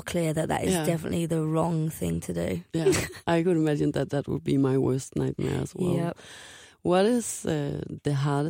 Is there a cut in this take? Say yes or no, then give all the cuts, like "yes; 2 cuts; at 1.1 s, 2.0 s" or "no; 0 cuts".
no; 0 cuts